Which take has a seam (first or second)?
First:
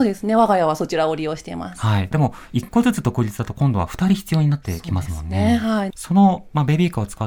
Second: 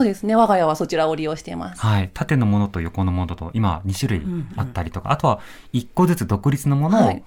first